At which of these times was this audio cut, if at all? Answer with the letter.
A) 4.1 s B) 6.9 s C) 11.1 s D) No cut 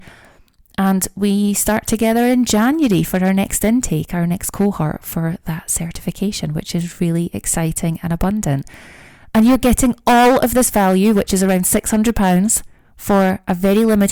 D